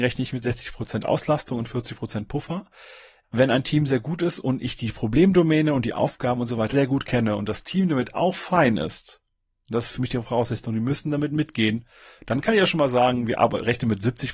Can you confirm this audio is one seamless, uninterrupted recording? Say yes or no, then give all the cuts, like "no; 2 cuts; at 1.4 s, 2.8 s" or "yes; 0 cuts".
no; 1 cut; at 6.7 s